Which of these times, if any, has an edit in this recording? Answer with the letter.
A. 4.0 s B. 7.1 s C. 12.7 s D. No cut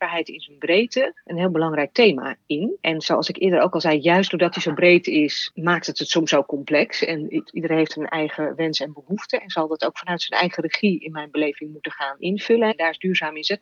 C